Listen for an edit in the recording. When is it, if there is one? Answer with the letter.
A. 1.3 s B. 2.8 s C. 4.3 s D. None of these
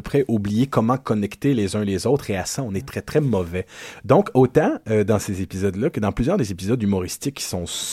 B